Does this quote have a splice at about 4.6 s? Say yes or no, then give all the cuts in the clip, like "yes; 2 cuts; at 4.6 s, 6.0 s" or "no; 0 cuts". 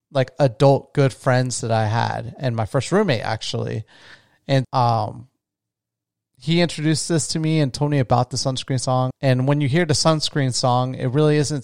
yes; 2 cuts; at 4.6 s, 9.1 s